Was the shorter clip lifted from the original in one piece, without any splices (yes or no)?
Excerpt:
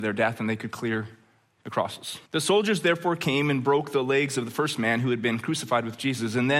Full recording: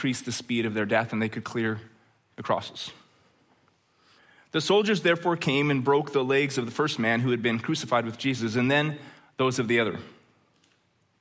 no